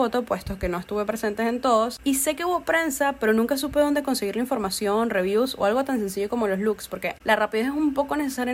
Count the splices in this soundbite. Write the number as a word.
one